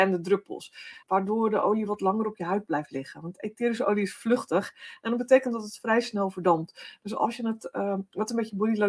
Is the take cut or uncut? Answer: cut